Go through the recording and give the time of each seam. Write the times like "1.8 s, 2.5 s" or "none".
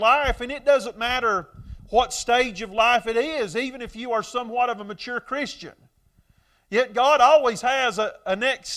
none